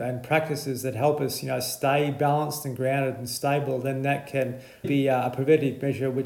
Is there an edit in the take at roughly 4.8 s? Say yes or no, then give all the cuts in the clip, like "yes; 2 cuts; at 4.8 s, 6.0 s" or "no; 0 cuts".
yes; 1 cut; at 4.8 s